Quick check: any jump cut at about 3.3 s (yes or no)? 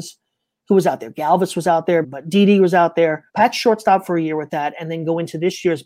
yes